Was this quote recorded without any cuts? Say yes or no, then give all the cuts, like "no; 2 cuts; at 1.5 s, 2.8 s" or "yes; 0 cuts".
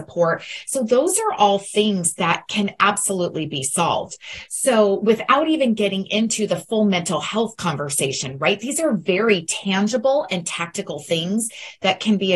yes; 0 cuts